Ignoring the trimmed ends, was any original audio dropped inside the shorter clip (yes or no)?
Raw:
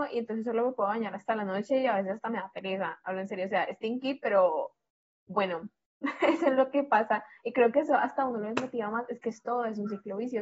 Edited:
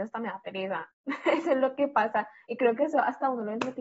yes